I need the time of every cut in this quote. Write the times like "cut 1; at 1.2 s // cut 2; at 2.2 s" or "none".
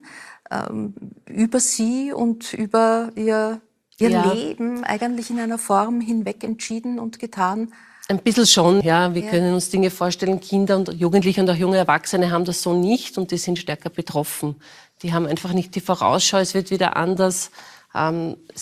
cut 1; at 8.8 s